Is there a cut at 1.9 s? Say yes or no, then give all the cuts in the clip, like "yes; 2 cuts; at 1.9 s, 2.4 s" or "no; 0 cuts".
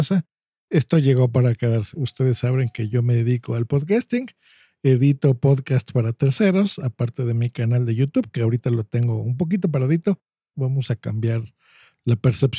yes; 2 cuts; at 1.9 s, 10.5 s